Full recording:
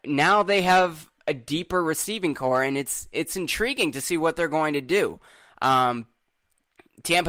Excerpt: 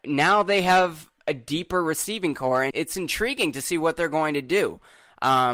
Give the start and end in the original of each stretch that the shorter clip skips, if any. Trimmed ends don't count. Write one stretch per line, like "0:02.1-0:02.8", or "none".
0:02.7-0:03.1